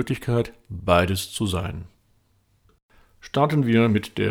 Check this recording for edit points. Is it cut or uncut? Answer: uncut